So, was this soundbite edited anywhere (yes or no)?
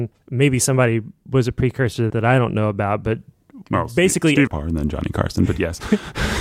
yes